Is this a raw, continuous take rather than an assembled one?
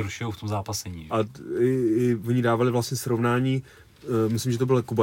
no; 1 cut; at 1.1 s

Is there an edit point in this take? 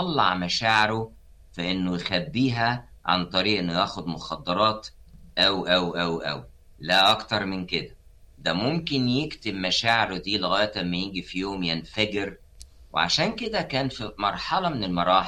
no; 0 cuts

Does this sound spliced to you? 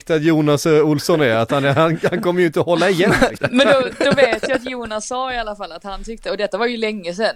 yes; 1 cut; at 3.4 s

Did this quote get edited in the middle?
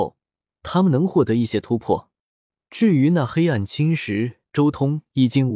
no; 0 cuts

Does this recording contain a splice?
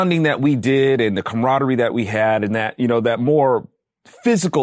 no; 0 cuts

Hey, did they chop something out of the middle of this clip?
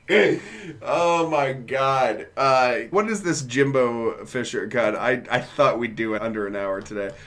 yes; 2 cuts; at 2.9 s, 6.2 s

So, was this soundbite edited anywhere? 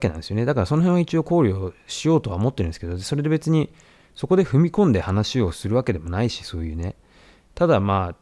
no; 0 cuts

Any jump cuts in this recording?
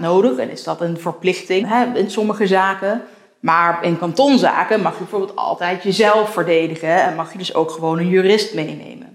yes; 1 cut; at 1.6 s

